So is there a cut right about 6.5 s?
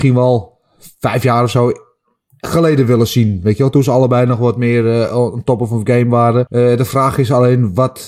yes; 1 cut; at 6.5 s

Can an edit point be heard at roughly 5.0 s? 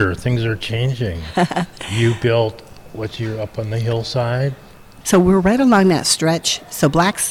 yes; 1 cut; at 5.0 s

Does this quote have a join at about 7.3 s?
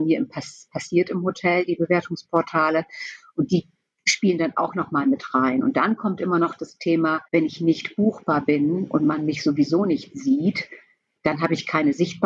yes; 1 cut; at 7.3 s

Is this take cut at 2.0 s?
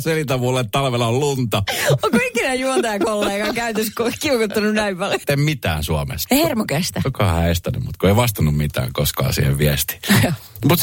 no; 2 cuts; at 5.2 s, 6.2 s

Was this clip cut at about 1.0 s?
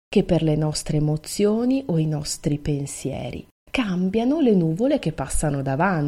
no; 1 cut; at 3.7 s

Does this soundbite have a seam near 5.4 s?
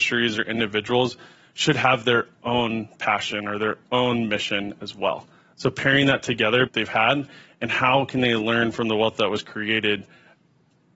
no; 1 cut; at 6.7 s

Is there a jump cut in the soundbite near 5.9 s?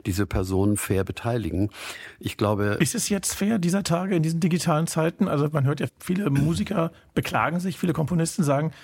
yes; 1 cut; at 5.9 s

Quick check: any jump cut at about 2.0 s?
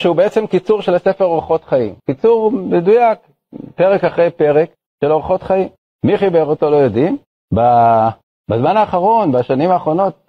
yes; 1 cut; at 2.0 s

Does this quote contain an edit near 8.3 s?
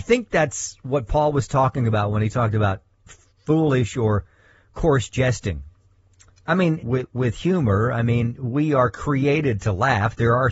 no; 1 cut; at 6.8 s

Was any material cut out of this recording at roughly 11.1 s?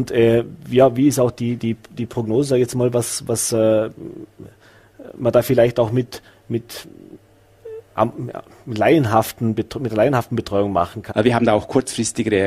yes; 2 cuts; at 7.9 s, 11.1 s

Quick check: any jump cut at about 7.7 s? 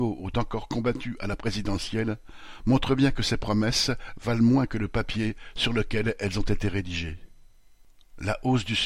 no; 0 cuts

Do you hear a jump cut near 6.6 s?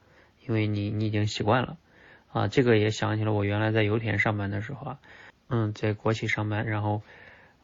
no; 1 cut; at 5.3 s

